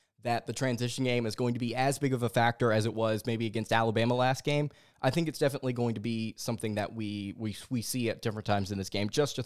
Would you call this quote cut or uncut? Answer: uncut